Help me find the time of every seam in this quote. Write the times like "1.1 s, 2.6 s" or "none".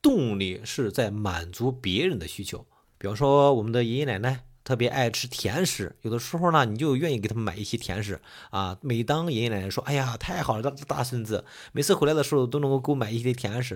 2.8 s

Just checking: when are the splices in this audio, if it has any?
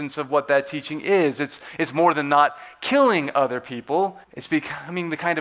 4.2 s

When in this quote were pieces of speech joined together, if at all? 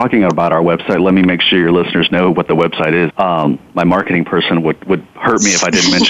3.1 s

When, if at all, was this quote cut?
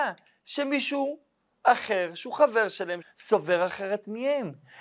3.0 s

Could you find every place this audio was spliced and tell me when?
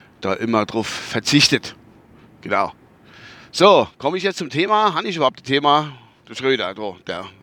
6.2 s

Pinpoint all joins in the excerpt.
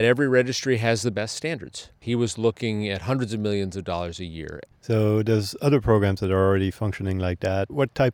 2.0 s, 4.7 s

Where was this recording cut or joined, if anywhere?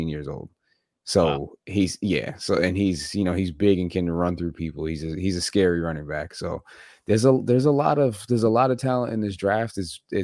none

